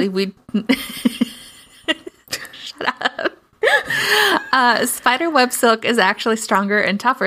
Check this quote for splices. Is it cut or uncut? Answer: uncut